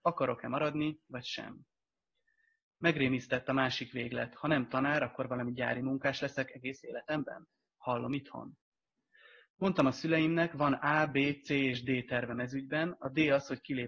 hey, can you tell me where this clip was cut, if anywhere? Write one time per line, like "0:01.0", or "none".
none